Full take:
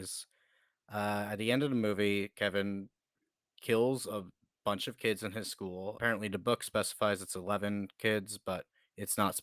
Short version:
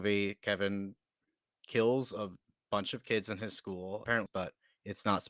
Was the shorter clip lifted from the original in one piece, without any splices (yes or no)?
no